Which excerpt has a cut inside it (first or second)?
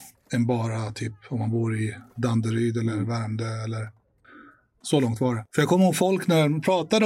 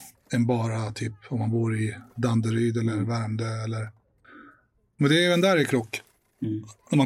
first